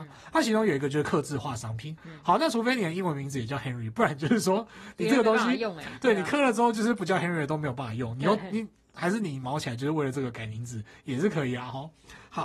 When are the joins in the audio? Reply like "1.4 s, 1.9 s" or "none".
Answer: 2.0 s